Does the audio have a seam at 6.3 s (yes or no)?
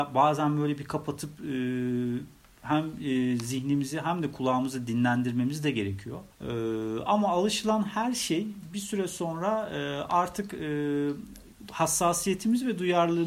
yes